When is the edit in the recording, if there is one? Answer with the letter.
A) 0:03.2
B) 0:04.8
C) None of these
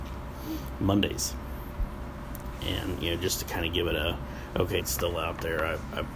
B